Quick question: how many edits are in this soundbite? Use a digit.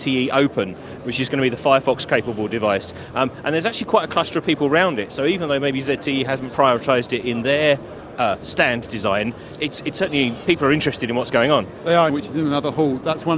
2